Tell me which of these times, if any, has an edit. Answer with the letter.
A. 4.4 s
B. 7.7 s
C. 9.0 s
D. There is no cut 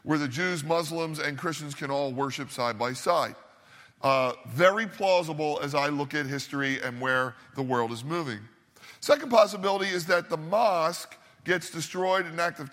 D